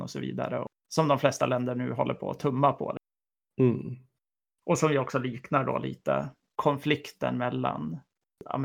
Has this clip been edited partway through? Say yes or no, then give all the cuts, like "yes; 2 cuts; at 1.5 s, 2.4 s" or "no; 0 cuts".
no; 0 cuts